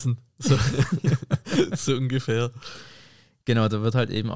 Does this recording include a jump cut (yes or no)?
no